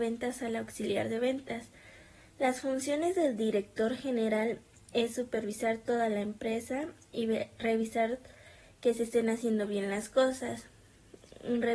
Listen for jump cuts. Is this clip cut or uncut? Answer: uncut